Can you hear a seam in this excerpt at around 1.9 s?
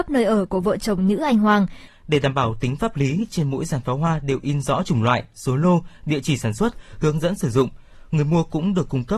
yes; 1 cut; at 1.9 s

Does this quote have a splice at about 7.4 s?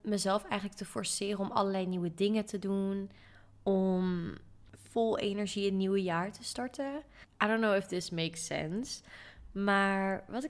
no; 0 cuts

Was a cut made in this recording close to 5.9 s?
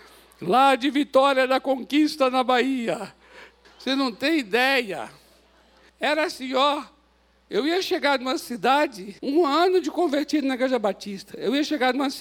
yes; 3 cuts; at 3.6 s, 5.9 s, 9.2 s

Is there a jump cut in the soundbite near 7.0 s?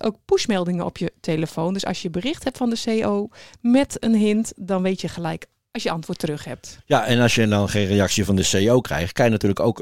no; 0 cuts

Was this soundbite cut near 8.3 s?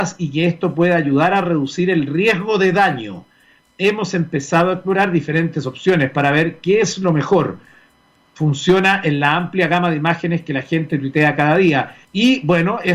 no; 1 cut; at 12.0 s

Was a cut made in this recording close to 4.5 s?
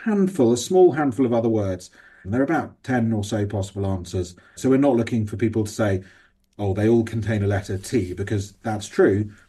no; 1 cut; at 2.2 s

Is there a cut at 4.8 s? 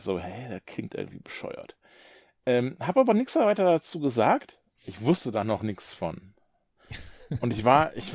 yes; 1 cut; at 4.8 s

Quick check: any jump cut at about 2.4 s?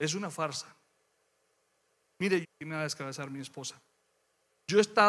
yes; 1 cut; at 2.4 s

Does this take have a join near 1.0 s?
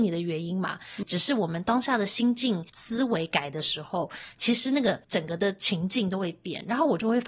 yes; 1 cut; at 1.0 s

